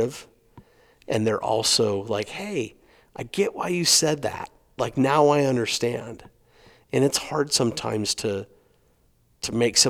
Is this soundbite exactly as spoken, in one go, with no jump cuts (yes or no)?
yes